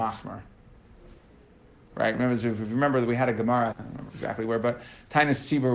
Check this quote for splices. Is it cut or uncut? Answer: cut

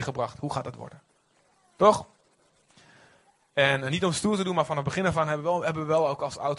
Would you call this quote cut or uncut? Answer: uncut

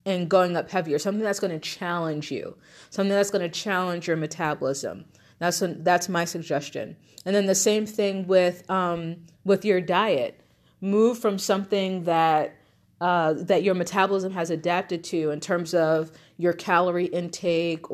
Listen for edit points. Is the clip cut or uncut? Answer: uncut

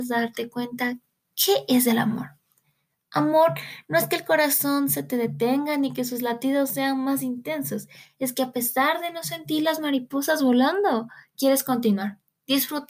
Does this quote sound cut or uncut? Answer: uncut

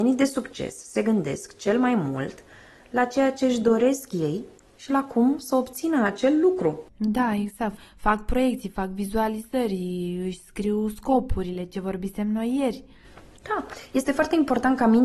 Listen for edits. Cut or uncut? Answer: uncut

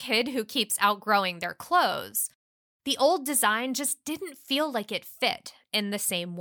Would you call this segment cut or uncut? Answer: uncut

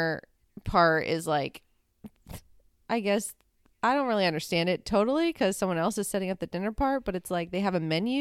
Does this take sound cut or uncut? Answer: uncut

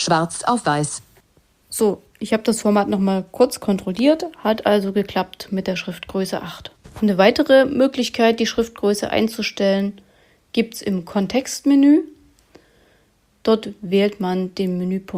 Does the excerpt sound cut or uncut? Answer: uncut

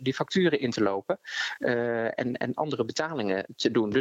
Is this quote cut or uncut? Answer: uncut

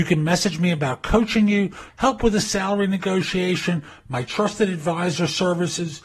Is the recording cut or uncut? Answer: cut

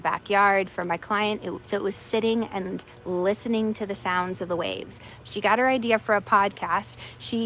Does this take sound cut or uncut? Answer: cut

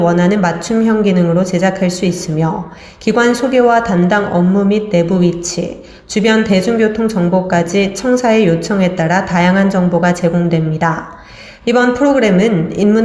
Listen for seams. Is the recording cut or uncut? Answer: cut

